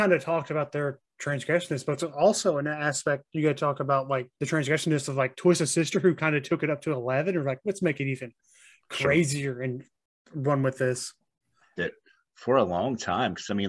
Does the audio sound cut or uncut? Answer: cut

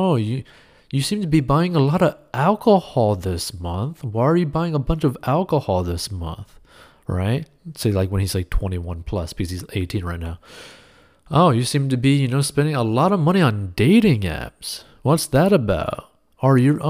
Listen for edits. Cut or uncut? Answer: uncut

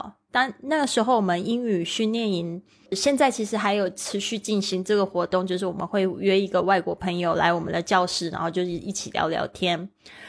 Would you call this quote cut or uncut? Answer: uncut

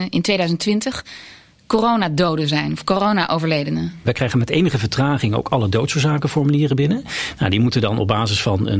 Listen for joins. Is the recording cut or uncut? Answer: cut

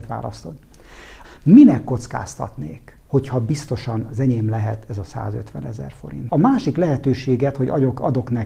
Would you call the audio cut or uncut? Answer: cut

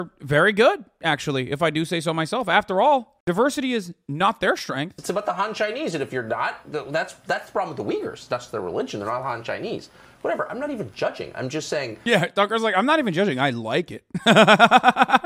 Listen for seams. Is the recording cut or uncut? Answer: cut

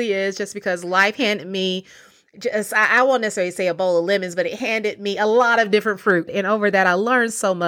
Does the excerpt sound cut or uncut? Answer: cut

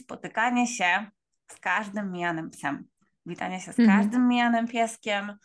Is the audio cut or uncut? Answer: uncut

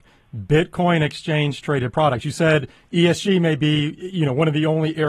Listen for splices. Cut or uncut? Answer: uncut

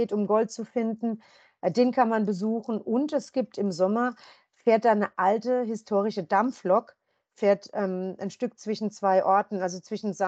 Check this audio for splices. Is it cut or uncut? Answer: uncut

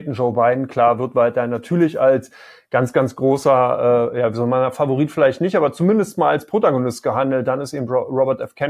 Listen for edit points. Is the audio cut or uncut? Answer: uncut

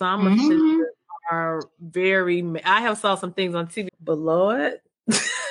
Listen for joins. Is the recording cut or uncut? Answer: cut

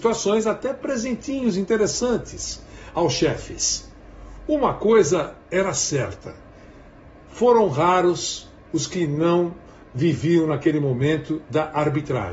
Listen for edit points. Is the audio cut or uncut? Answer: uncut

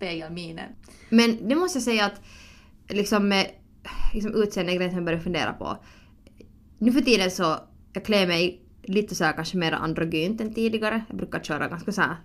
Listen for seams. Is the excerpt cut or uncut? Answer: uncut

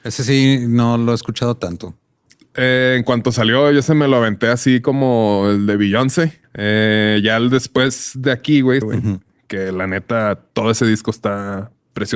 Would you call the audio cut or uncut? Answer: cut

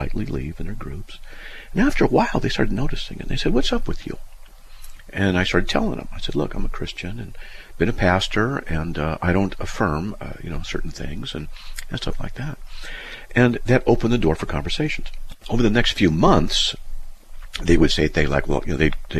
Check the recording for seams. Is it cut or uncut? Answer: cut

